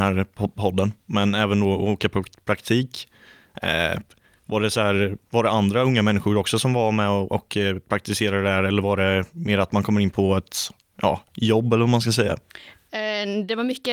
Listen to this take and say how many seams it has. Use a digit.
0